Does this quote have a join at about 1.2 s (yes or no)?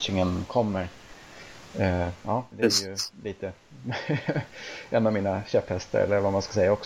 no